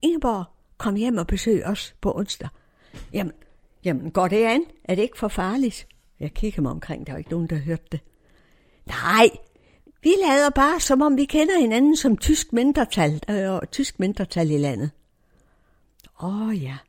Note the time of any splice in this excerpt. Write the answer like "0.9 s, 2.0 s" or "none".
9.9 s